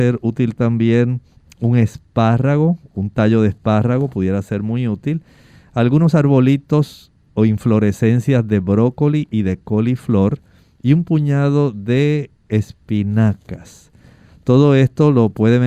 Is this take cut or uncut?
uncut